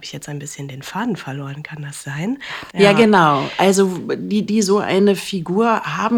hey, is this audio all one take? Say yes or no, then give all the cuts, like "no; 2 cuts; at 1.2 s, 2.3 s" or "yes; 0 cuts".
no; 2 cuts; at 2.7 s, 4.5 s